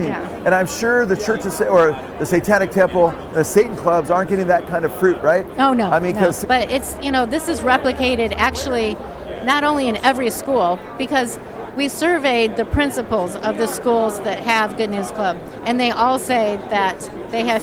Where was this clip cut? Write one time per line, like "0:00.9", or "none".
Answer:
0:06.4